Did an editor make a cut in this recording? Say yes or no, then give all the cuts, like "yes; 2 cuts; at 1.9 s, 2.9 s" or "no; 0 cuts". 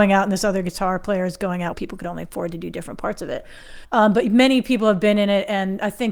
yes; 2 cuts; at 1.7 s, 3.8 s